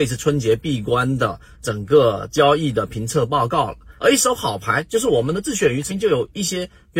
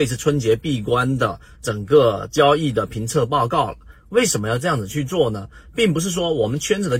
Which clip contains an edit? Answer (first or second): first